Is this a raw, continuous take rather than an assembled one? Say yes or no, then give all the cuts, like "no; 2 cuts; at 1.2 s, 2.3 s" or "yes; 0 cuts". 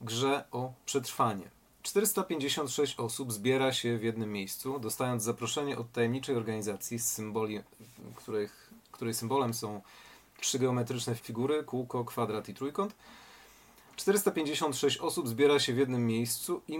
no; 1 cut; at 11.2 s